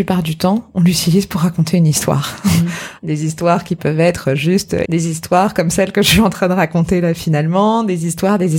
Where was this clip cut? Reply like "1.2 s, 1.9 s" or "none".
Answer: 3.0 s, 4.8 s